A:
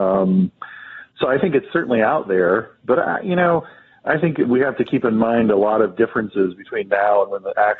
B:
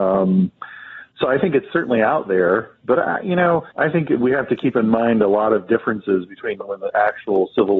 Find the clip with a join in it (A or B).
B